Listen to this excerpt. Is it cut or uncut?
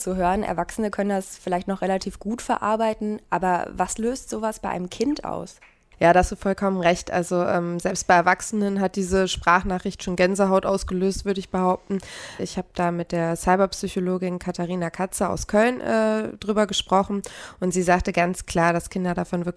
cut